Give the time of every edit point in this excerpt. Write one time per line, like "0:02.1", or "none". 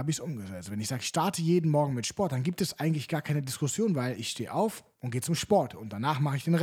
0:04.9